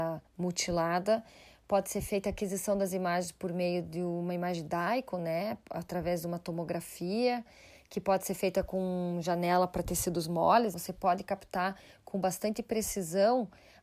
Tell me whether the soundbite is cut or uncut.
cut